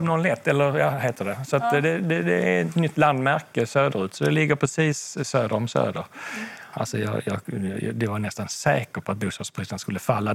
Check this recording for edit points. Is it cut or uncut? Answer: cut